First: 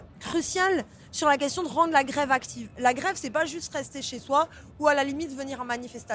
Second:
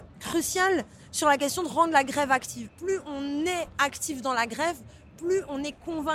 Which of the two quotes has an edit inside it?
second; 1 cut; at 2.7 s

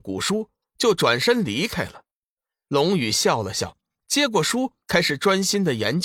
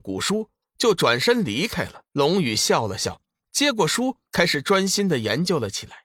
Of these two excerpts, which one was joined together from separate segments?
second; 1 cut; at 2.1 s

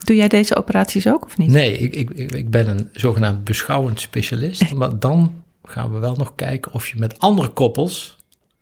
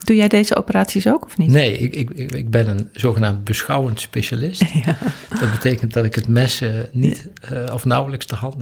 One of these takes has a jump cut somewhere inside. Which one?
first; 1 cut; at 4.7 s

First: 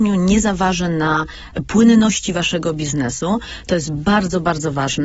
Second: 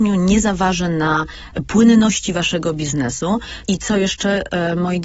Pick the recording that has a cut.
second; 1 cut; at 3.7 s

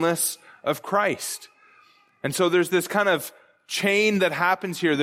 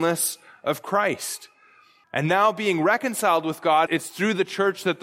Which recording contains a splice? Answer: second; 2 cuts; at 2.0 s, 3.9 s

